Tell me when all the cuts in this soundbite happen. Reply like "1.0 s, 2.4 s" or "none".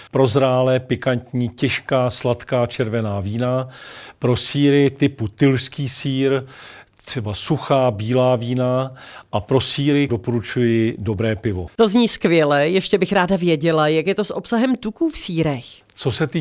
10.1 s